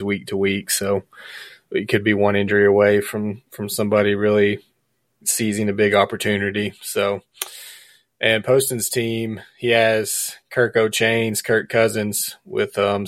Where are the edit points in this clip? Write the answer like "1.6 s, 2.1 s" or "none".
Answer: none

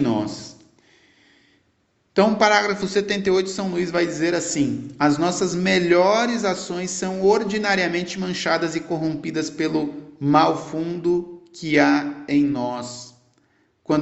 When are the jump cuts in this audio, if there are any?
none

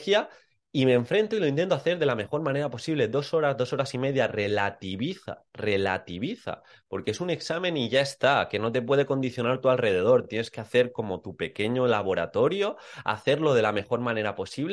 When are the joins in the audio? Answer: none

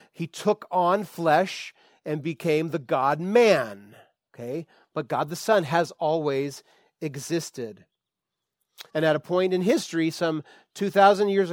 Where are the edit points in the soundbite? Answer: 8.9 s

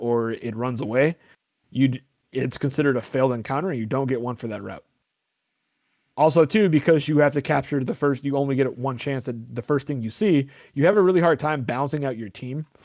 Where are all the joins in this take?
none

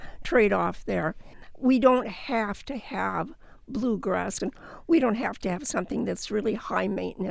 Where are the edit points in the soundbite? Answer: 4.4 s

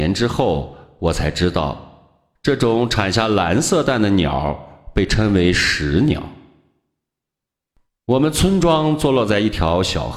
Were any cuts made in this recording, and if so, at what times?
none

